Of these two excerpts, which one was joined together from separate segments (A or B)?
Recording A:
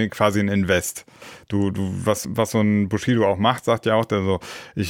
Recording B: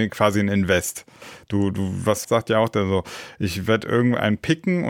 B